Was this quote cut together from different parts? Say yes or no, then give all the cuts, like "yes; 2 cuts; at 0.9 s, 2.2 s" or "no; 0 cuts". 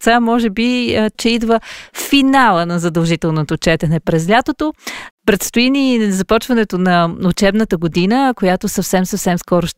yes; 2 cuts; at 1.1 s, 5.1 s